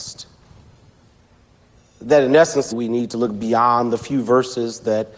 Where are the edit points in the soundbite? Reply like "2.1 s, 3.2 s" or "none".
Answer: 2.7 s

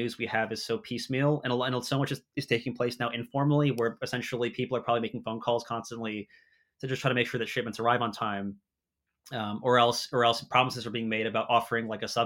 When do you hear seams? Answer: none

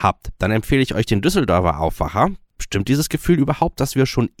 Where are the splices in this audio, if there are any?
2.5 s

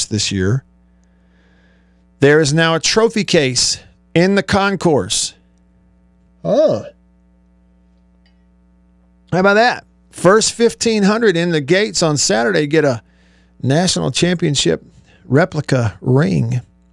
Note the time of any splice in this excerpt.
6.3 s

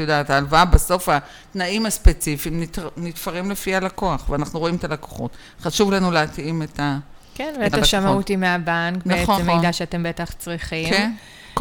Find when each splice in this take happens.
7.7 s, 9.4 s

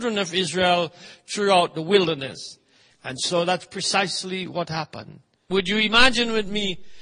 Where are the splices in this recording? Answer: 2.9 s, 5.5 s

